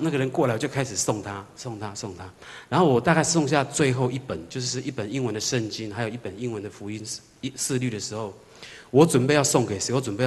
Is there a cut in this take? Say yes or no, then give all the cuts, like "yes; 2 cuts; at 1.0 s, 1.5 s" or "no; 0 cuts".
no; 0 cuts